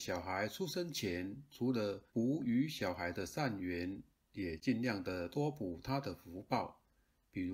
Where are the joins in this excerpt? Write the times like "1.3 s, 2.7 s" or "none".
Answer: 2.1 s